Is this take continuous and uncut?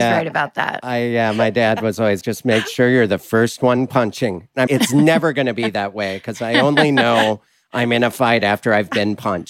no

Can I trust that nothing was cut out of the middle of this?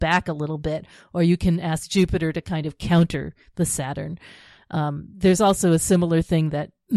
yes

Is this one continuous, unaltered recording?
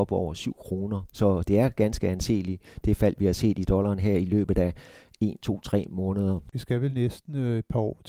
yes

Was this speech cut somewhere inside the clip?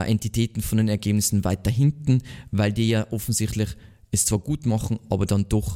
no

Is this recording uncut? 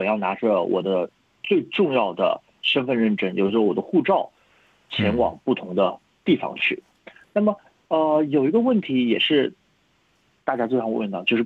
yes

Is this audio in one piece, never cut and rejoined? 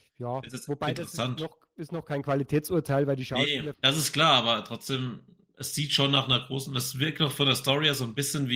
no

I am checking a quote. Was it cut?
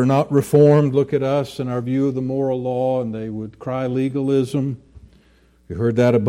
no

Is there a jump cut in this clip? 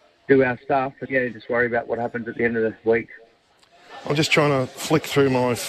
yes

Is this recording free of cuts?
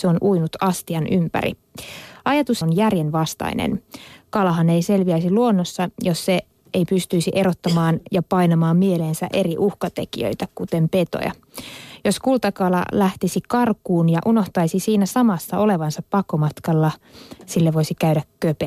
no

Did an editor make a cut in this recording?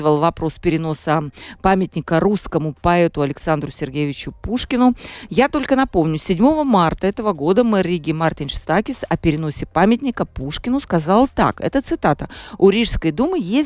no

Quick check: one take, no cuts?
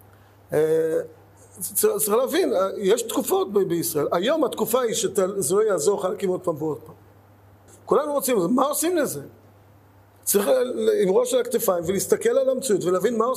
no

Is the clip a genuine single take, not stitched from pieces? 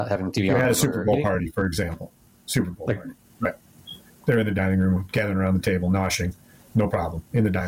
no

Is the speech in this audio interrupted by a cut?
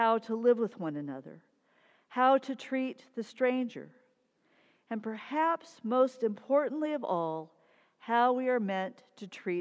no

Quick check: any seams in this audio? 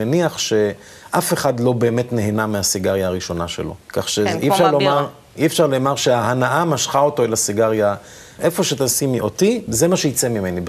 yes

